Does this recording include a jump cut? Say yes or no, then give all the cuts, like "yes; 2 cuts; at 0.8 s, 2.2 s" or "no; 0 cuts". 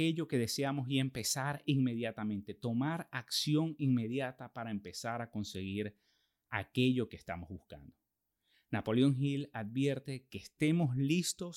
no; 0 cuts